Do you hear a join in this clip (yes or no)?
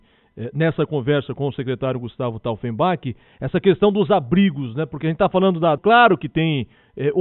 yes